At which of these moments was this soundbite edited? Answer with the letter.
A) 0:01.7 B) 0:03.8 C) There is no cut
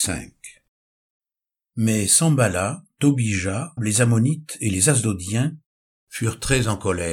B